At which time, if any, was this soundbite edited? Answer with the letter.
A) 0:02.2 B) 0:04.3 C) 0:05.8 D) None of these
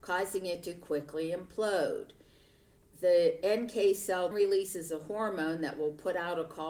B